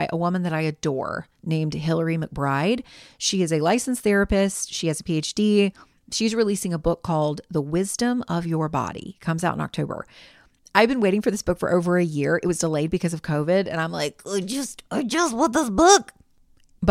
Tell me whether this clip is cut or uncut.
uncut